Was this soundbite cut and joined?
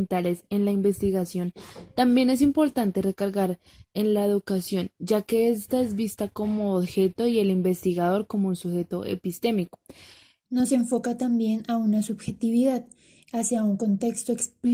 yes; 1 cut; at 10.4 s

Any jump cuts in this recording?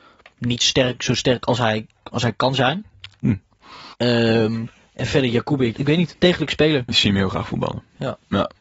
yes; 3 cuts; at 3.9 s, 5.7 s, 6.9 s

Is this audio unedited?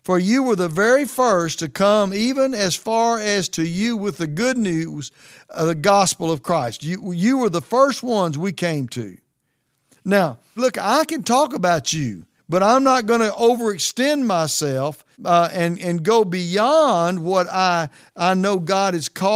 no; 3 cuts; at 10.6 s, 12.4 s, 15.1 s

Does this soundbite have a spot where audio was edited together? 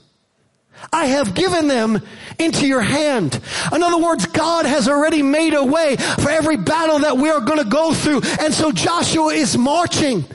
yes; 1 cut; at 8.4 s

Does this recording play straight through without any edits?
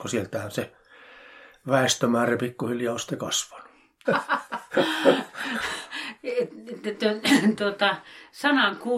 no; 1 cut; at 4.0 s

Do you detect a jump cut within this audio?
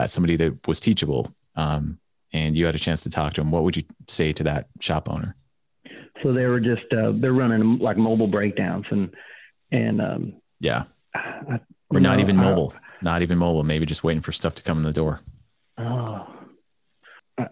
no; 0 cuts

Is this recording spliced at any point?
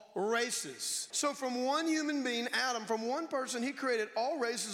yes; 1 cut; at 1.1 s

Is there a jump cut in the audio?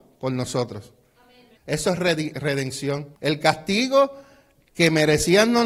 yes; 2 cuts; at 1.6 s, 3.1 s

